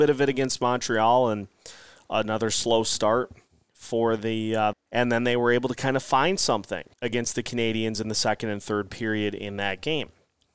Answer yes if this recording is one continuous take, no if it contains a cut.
no